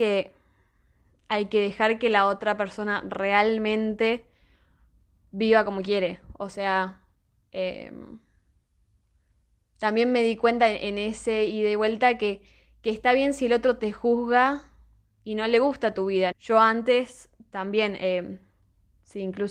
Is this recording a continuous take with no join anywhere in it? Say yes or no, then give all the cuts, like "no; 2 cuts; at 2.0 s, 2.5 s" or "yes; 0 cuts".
no; 1 cut; at 16.3 s